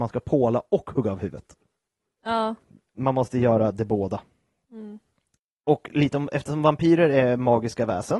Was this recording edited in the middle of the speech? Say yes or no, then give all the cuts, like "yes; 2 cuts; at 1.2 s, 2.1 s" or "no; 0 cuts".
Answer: no; 0 cuts